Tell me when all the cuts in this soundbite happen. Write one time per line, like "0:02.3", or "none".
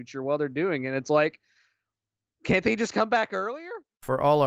none